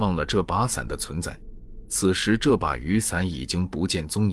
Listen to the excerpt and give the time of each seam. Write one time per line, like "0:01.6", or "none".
none